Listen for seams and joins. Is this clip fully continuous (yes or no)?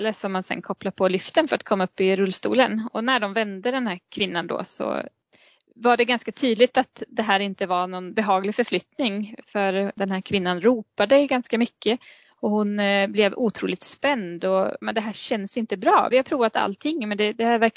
no